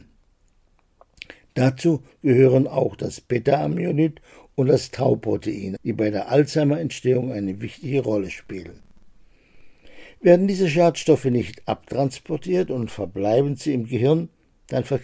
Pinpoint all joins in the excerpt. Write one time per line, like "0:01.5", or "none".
0:05.8